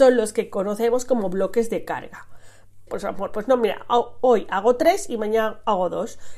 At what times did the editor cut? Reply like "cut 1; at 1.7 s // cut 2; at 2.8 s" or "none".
cut 1; at 2.9 s